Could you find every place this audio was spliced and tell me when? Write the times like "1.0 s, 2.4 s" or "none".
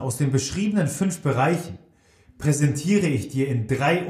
2.2 s